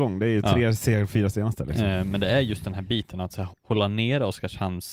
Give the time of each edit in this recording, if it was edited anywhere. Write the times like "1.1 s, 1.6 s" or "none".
3.5 s

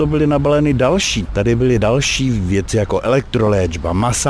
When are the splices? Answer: 1.3 s

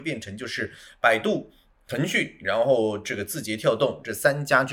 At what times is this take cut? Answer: none

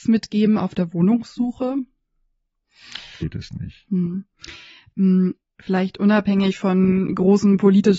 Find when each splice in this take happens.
3.2 s

